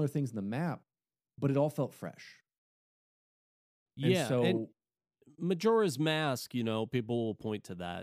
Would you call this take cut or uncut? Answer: uncut